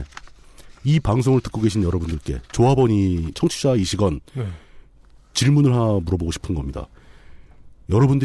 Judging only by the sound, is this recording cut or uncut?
cut